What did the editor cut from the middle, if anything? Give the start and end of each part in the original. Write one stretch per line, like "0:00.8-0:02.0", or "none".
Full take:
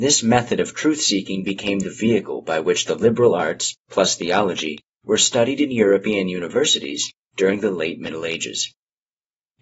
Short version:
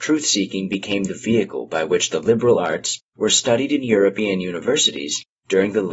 0:03.8-0:05.0